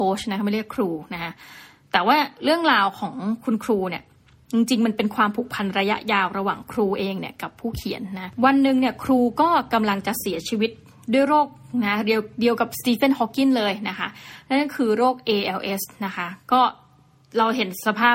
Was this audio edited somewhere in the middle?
no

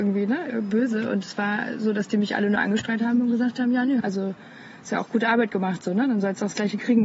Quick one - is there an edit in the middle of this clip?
yes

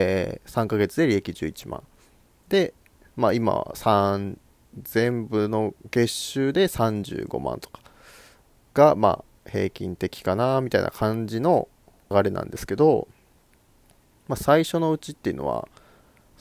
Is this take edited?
yes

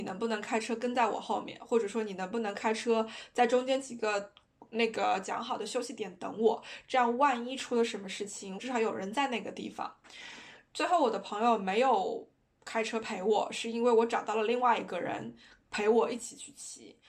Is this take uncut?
no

